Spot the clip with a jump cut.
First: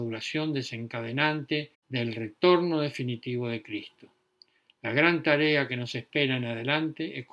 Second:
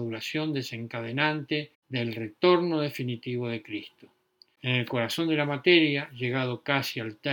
second; 1 cut; at 4.6 s

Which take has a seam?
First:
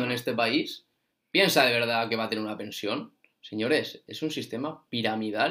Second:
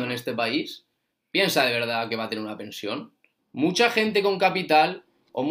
second; 1 cut; at 3.4 s

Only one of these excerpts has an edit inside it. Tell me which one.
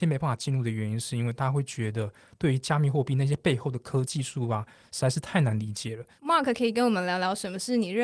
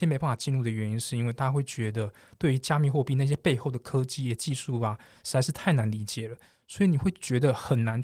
first; 2 cuts; at 4.0 s, 6.2 s

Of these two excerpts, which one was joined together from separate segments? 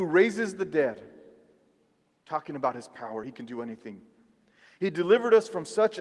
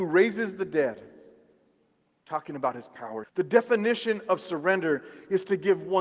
second; 1 cut; at 3.2 s

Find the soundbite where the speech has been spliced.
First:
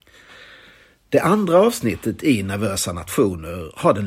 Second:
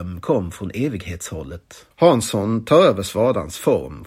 second; 1 cut; at 1.9 s

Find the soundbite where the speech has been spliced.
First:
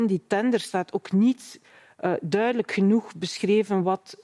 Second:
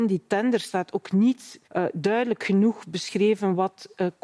second; 1 cut; at 1.6 s

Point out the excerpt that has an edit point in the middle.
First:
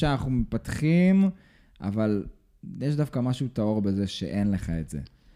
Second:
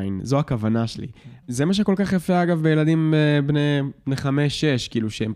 second; 1 cut; at 1.4 s

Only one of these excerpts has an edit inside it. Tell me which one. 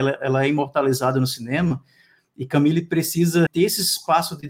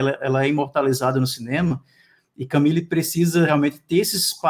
first; 1 cut; at 3.5 s

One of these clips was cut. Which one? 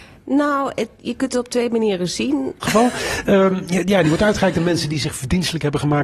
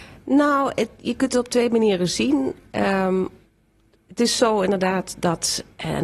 first; 1 cut; at 2.6 s

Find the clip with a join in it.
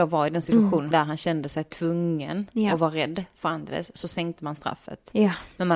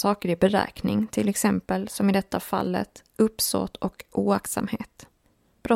first; 1 cut; at 0.9 s

